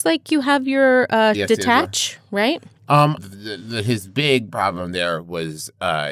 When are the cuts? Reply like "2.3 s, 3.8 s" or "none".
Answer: 1.3 s, 3.2 s